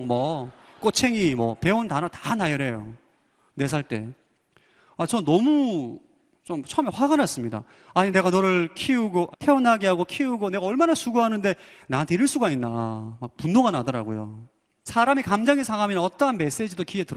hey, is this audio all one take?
no; 2 cuts; at 9.3 s, 14.9 s

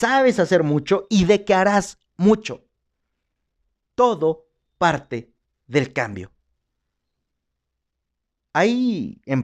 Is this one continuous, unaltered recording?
yes; 0 cuts

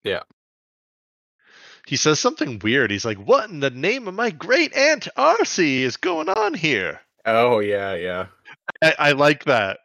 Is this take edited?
no; 0 cuts

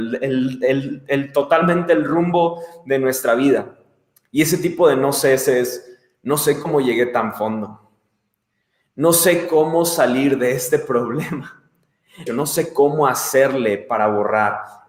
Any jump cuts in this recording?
yes; 1 cut; at 12.3 s

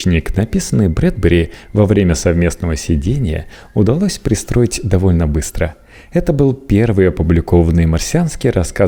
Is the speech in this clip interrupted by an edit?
no; 0 cuts

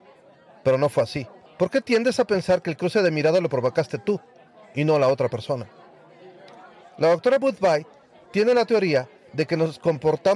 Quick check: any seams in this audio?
yes; 1 cut; at 1.5 s

